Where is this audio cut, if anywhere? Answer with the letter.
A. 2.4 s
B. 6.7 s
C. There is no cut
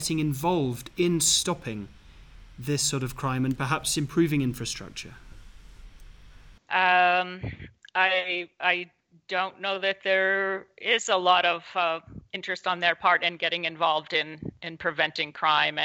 B